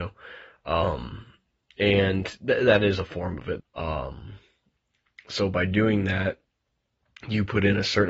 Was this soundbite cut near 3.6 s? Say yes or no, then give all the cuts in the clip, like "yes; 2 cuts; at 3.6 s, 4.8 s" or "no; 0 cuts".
yes; 1 cut; at 3.6 s